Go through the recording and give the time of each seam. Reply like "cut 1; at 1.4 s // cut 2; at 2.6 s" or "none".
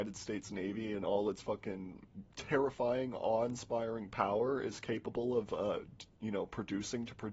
cut 1; at 2.3 s